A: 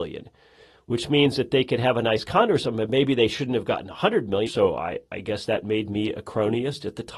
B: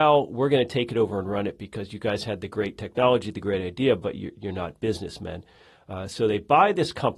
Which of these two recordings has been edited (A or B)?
A